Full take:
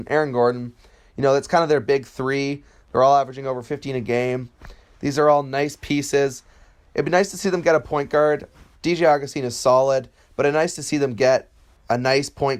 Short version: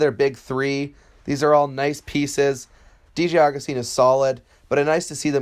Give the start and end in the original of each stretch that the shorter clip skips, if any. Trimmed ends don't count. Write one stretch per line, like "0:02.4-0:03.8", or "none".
0:02.8-0:04.9
0:06.8-0:08.7